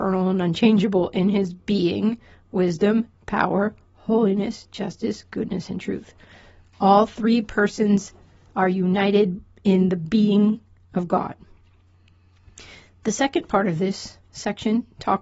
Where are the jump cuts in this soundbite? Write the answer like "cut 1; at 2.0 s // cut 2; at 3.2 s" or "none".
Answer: none